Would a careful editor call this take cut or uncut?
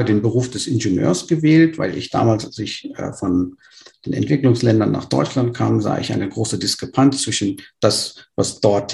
uncut